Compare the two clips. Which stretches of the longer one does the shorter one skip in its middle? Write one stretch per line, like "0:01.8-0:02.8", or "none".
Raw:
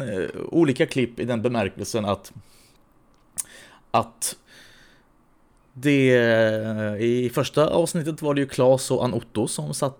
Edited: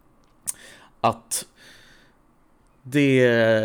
none